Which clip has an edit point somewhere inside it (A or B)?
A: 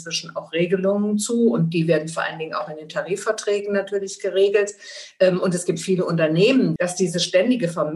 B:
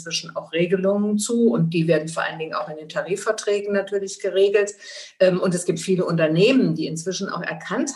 A